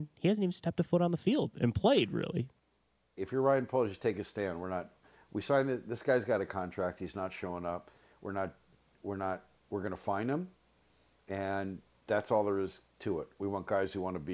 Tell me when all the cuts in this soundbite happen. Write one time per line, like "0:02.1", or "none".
0:03.2